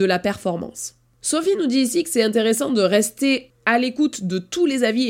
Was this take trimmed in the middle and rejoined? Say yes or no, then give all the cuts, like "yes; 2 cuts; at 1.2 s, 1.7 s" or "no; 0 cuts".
no; 0 cuts